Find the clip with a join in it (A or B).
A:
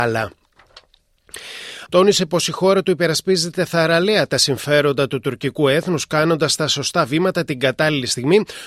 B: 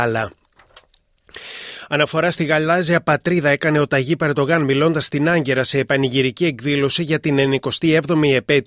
A